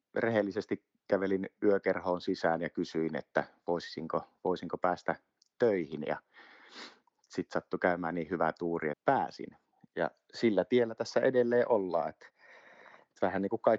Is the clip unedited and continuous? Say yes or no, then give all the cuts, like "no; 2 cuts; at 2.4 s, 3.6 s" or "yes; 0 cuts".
no; 1 cut; at 8.9 s